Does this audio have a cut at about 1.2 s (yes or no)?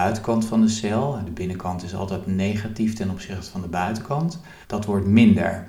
no